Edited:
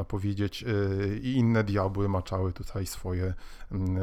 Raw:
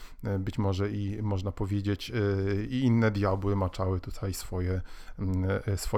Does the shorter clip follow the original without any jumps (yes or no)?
yes